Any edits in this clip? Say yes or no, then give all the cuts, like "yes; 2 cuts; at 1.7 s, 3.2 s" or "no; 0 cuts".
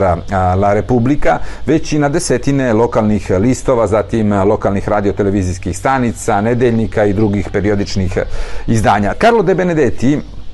yes; 1 cut; at 9.1 s